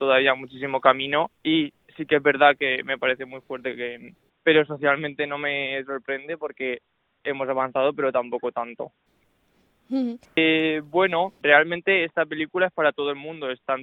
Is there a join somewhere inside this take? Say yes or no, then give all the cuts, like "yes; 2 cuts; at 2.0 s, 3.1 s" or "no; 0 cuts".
yes; 3 cuts; at 4.3 s, 10.2 s, 11.4 s